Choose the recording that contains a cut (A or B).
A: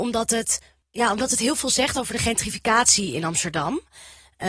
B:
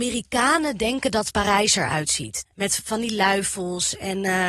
B